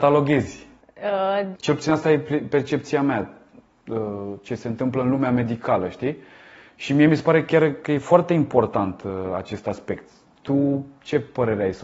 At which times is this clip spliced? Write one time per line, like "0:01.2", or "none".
0:01.6